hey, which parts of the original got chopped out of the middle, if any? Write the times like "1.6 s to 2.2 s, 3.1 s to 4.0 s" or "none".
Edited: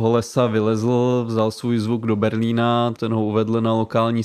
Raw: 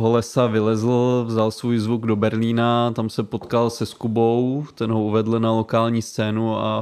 3.0 s to 4.7 s